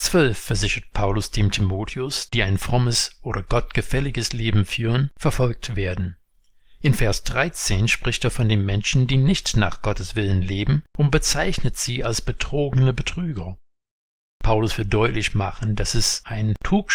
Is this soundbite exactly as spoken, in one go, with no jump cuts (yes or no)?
no